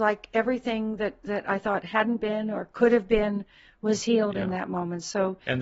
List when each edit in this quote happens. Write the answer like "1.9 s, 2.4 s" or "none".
none